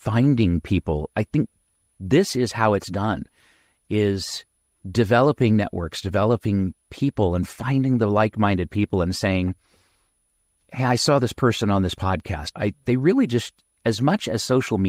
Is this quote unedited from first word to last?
no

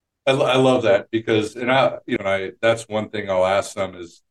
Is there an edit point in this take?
yes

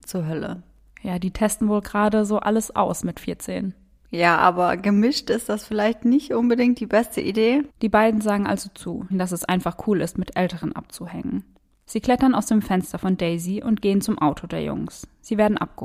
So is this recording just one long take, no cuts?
no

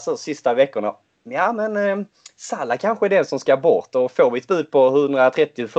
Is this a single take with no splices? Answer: yes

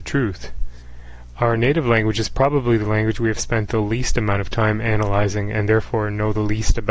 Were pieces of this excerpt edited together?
no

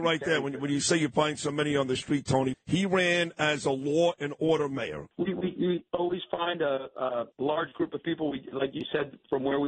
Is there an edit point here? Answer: yes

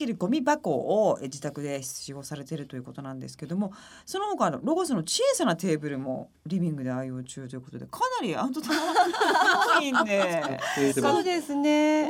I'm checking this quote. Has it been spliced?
yes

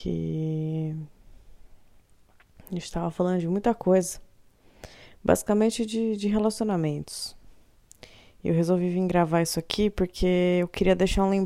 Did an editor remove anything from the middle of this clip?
no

